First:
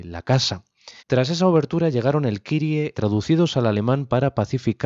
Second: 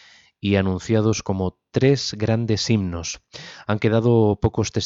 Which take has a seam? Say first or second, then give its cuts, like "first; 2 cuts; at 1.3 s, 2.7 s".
first; 2 cuts; at 1.0 s, 2.9 s